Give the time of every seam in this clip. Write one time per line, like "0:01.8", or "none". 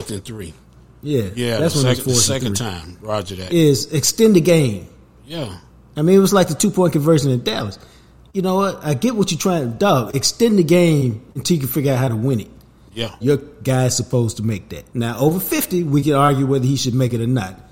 0:13.2
0:14.9